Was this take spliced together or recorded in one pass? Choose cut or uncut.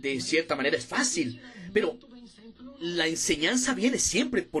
uncut